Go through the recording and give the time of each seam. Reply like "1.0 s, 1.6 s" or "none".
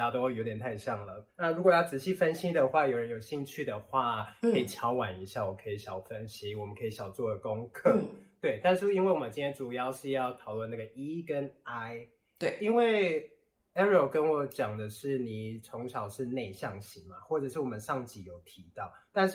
none